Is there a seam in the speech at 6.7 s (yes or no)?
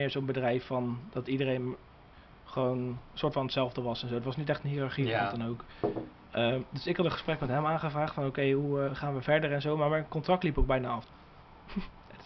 no